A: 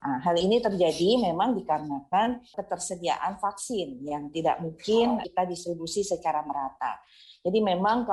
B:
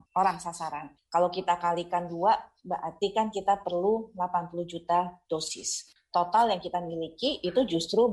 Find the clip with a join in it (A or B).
B